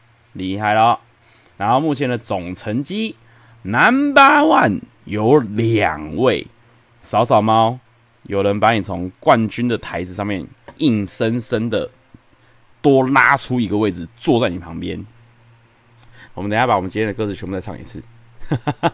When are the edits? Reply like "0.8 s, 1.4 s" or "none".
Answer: 10.8 s, 16.3 s